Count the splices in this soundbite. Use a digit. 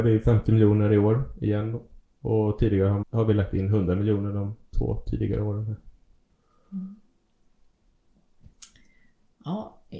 1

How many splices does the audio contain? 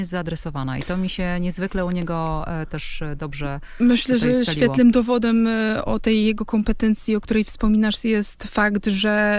1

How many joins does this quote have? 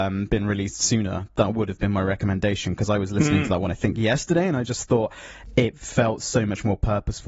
0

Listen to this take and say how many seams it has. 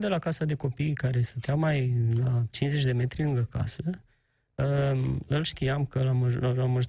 0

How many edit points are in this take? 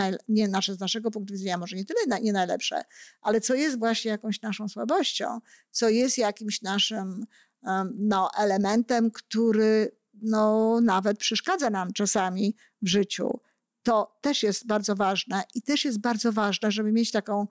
0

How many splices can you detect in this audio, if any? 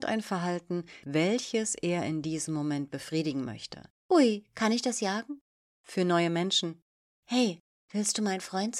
2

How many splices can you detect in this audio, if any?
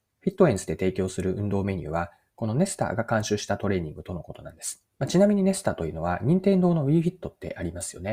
1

